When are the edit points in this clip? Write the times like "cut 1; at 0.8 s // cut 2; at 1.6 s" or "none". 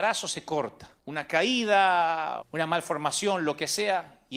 cut 1; at 1.0 s // cut 2; at 2.4 s